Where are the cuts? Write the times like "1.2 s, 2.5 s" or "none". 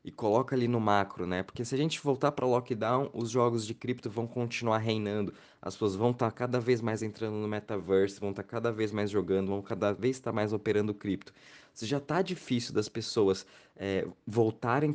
none